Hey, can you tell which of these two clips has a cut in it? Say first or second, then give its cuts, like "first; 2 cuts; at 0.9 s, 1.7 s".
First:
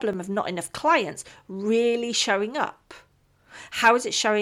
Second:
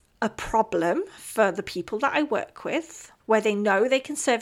second; 1 cut; at 3.2 s